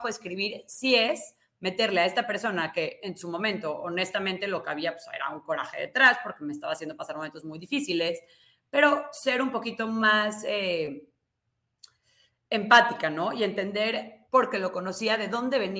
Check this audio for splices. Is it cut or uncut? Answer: uncut